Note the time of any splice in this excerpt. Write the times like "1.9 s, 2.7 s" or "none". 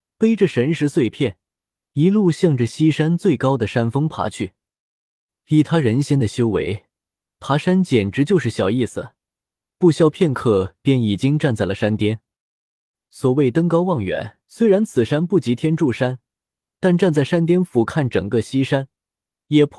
14.4 s